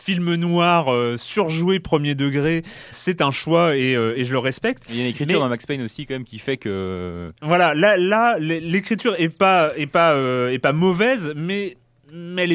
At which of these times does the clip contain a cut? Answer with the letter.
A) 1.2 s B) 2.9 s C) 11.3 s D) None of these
B